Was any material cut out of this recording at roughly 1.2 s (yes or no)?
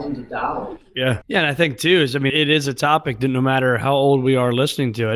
yes